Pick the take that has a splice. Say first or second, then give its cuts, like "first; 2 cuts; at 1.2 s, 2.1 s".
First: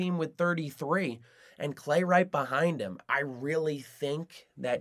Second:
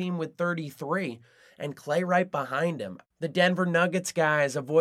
second; 1 cut; at 3.0 s